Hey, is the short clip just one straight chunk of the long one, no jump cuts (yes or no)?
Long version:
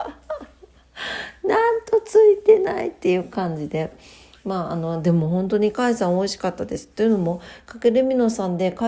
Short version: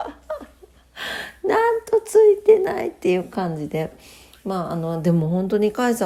yes